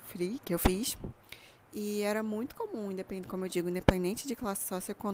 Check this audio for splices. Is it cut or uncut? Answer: uncut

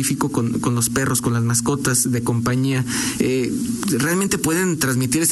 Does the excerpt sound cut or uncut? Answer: uncut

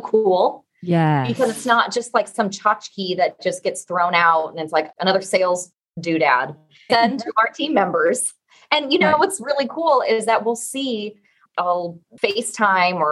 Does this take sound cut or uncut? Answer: cut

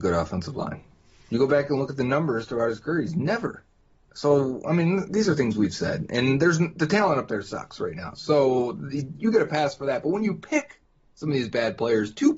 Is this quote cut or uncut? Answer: uncut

